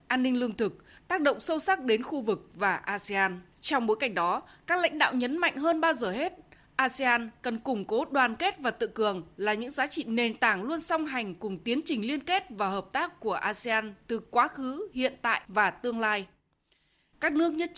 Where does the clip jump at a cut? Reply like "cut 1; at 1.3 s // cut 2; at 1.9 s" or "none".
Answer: cut 1; at 3.5 s